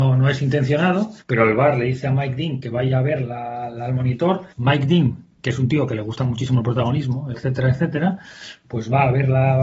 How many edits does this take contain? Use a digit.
3